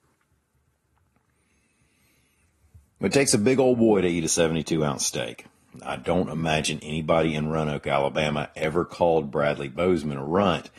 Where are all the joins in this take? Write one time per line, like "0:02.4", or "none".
none